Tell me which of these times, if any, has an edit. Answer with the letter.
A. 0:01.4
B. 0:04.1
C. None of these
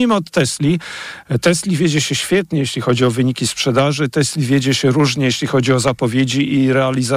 C